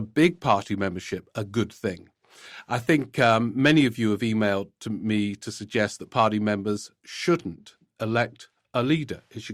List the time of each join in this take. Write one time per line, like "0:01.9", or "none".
none